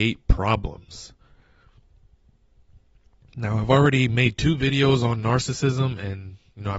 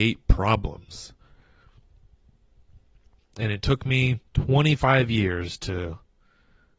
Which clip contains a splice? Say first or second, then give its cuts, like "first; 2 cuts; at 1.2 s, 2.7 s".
second; 2 cuts; at 3.2 s, 4.3 s